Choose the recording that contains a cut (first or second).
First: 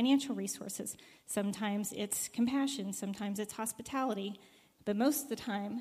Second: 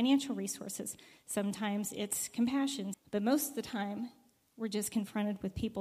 second